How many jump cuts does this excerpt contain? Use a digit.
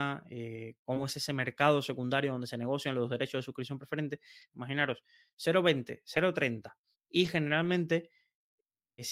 1